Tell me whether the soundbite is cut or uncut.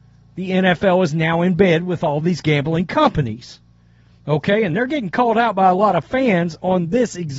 uncut